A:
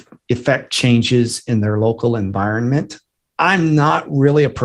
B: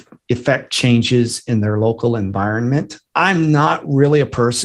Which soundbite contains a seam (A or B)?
B